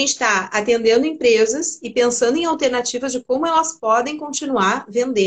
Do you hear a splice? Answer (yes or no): no